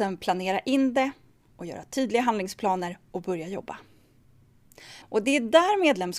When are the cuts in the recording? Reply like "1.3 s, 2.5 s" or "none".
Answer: 5.0 s